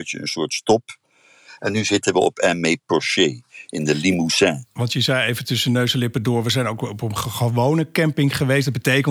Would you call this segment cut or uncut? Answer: uncut